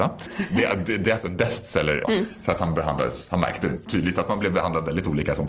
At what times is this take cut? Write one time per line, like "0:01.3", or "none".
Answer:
0:02.0